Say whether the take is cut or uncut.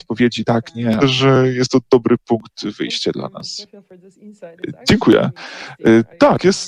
cut